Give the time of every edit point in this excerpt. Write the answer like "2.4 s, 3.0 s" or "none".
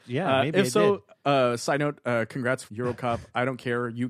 2.7 s